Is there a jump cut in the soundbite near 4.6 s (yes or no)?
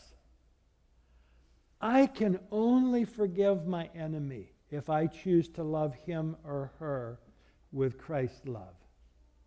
yes